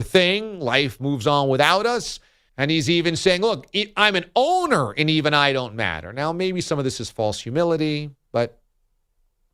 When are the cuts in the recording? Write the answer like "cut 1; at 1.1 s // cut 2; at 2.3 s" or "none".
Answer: cut 1; at 2.5 s